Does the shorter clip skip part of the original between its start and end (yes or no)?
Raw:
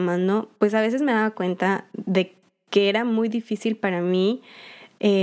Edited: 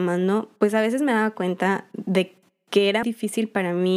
yes